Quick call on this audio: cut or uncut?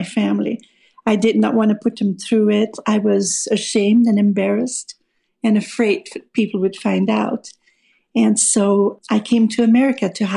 uncut